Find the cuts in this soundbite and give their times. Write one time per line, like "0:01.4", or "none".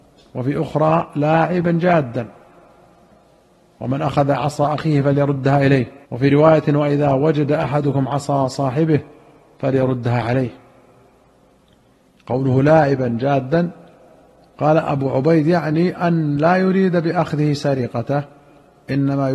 0:06.0